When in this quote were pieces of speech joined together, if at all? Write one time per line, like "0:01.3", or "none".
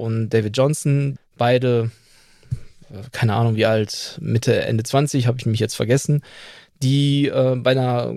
0:01.2